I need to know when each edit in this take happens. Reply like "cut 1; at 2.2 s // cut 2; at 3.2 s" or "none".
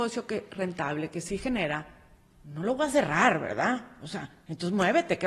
none